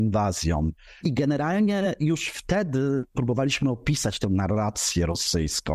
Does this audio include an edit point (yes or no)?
yes